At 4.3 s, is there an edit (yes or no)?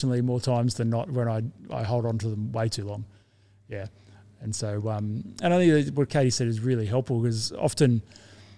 no